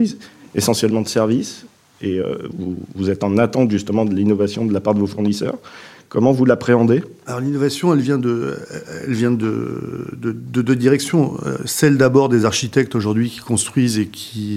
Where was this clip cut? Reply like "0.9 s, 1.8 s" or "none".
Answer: 2.5 s

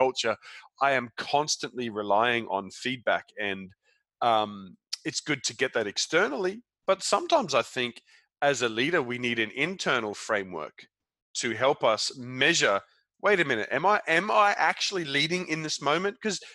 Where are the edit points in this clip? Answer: none

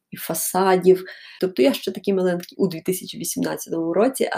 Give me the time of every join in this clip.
1.4 s, 2.5 s

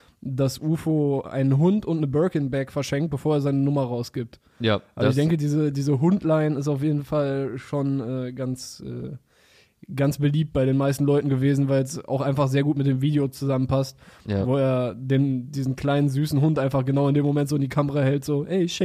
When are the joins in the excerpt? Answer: none

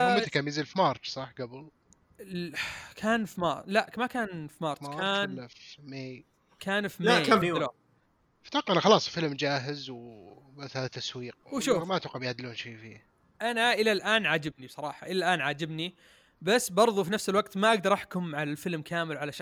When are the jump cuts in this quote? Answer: 7.4 s, 11.4 s

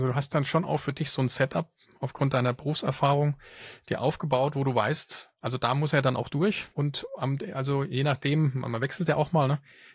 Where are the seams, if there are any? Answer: 6.7 s

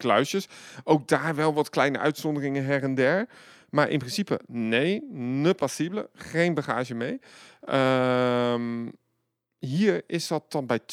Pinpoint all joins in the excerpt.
none

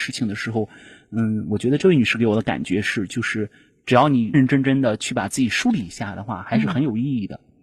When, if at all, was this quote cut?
4.3 s

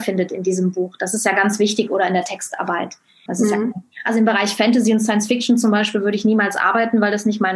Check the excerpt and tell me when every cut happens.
3.3 s

